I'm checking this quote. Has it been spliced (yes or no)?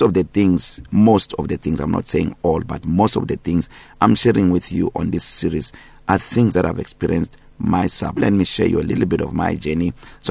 yes